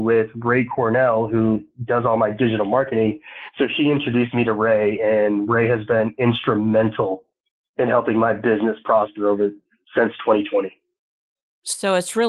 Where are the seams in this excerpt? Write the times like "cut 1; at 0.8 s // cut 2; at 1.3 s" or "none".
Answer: none

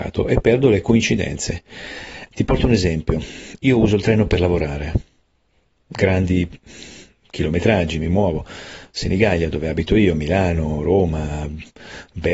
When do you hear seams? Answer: cut 1; at 2.3 s

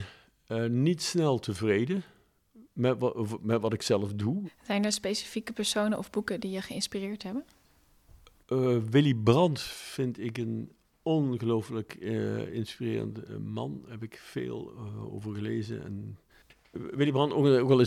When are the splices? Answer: cut 1; at 4.4 s

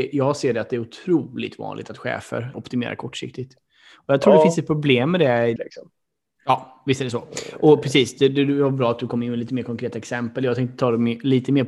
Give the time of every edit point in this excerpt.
cut 1; at 2.5 s // cut 2; at 5.6 s

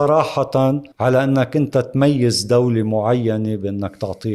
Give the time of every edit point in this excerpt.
cut 1; at 0.9 s

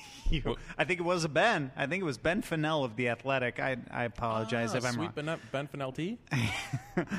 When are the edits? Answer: none

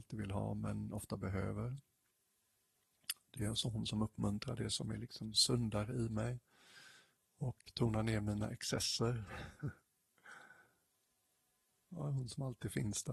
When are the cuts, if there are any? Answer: cut 1; at 7.7 s

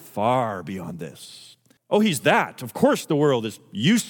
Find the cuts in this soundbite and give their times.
cut 1; at 1.8 s

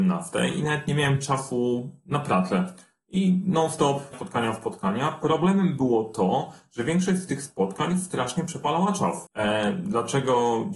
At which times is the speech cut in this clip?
cut 1; at 4.1 s // cut 2; at 9.3 s

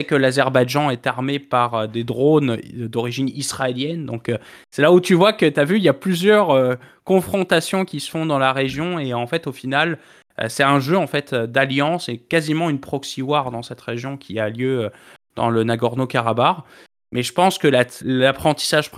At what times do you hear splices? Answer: cut 1; at 18.0 s

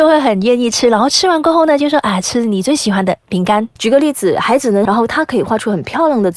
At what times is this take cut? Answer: cut 1; at 3.8 s // cut 2; at 4.9 s

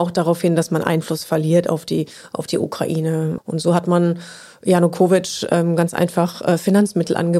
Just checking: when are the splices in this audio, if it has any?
cut 1; at 3.4 s

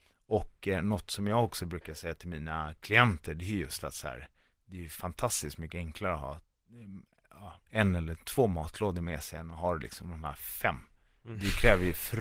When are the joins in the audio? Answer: none

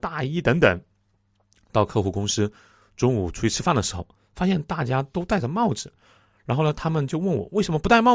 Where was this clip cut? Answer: none

